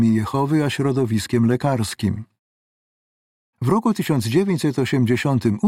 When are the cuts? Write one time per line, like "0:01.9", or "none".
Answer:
none